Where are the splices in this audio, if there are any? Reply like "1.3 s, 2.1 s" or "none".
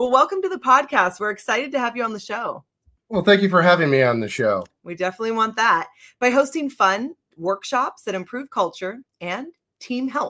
4.8 s